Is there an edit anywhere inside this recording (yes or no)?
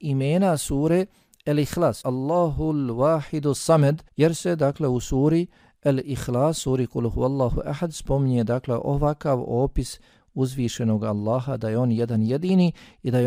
yes